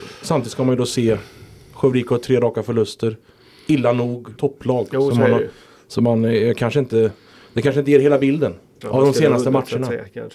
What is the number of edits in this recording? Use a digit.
2